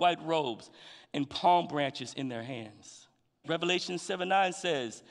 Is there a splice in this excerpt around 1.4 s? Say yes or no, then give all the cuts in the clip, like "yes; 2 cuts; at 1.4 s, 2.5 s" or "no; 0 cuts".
no; 1 cut; at 3.4 s